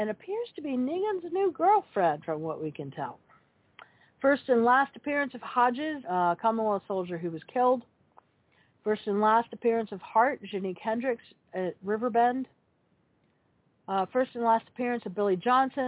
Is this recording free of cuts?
no; 1 cut; at 6.0 s

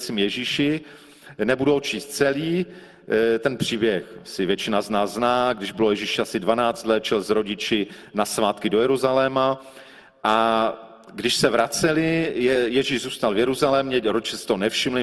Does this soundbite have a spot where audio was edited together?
no; 0 cuts

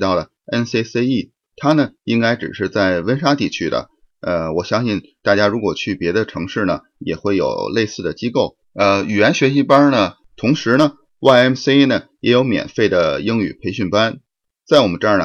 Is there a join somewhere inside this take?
yes; 2 cuts; at 8.6 s, 10.2 s

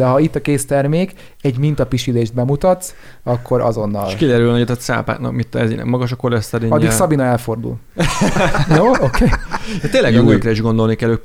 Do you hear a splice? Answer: no; 0 cuts

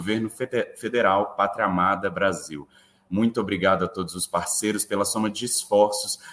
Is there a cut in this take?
no; 0 cuts

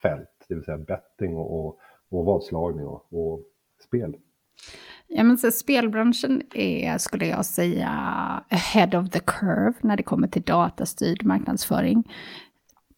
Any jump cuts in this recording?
no; 0 cuts

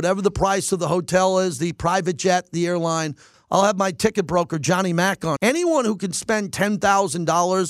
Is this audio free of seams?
no; 2 cuts; at 3.3 s, 5.4 s

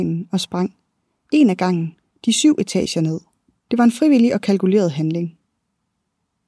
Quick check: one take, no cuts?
no; 1 cut; at 3.6 s

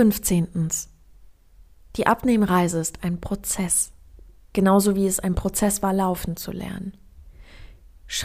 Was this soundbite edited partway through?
no; 0 cuts

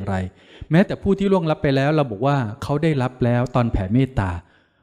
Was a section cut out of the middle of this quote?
no; 0 cuts

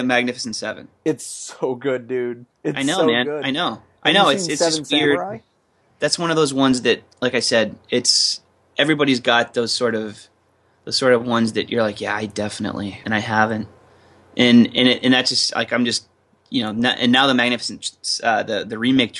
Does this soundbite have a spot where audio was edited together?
yes; 1 cut; at 13.0 s

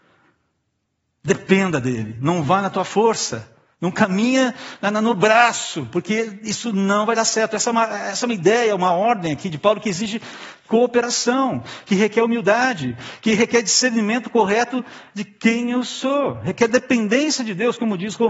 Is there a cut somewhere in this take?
no; 0 cuts

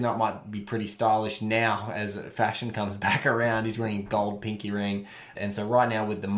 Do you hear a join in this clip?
yes; 1 cut; at 5.3 s

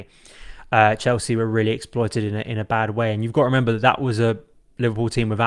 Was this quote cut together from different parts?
no; 0 cuts

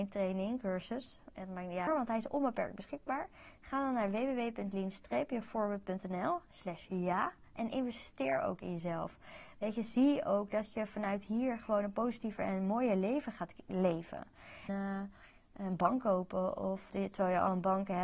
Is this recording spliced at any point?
yes; 3 cuts; at 1.9 s, 14.7 s, 16.9 s

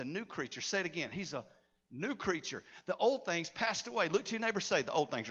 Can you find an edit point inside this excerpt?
no; 0 cuts

